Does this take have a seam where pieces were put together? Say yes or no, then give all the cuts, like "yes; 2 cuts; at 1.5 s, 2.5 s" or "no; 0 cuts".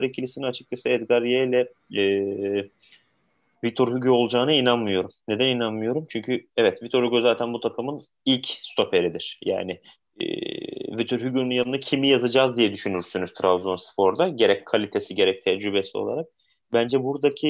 no; 0 cuts